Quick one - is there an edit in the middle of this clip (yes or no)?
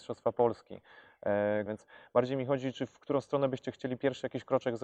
yes